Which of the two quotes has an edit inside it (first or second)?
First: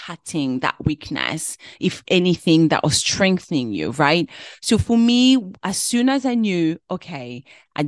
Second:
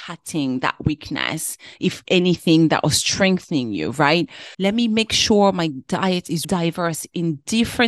second